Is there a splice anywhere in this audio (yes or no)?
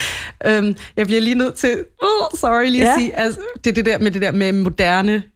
no